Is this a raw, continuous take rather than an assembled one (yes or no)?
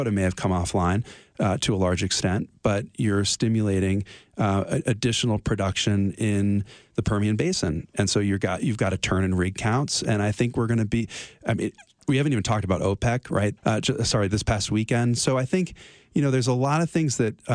no